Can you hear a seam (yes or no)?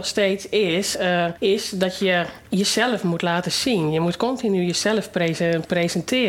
no